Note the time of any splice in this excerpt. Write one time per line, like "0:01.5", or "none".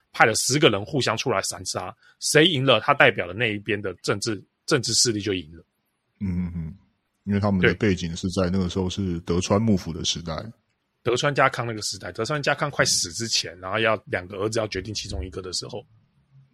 none